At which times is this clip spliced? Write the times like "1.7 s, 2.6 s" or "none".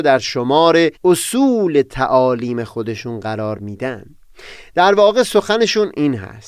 1.0 s